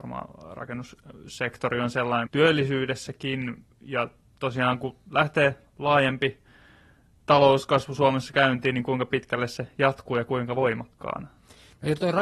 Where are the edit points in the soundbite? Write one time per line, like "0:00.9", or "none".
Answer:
0:02.3